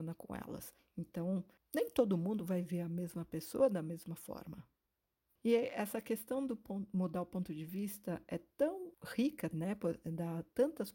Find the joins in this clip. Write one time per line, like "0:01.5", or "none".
0:09.5